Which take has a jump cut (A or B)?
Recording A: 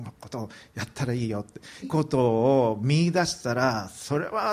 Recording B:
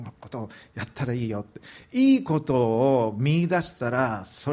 A